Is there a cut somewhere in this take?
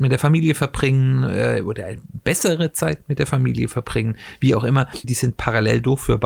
yes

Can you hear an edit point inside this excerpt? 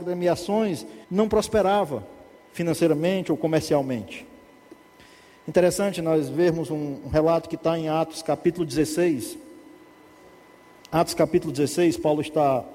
yes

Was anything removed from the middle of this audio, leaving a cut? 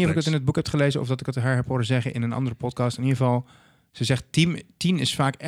no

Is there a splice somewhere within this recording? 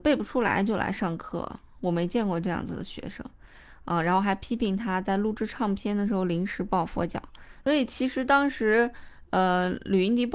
yes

